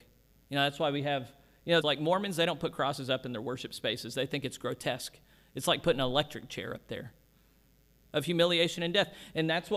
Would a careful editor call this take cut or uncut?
cut